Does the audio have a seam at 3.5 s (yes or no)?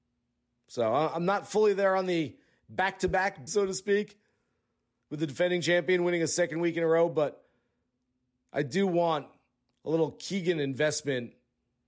yes